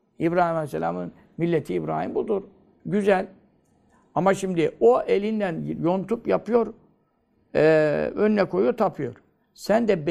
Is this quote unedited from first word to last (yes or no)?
yes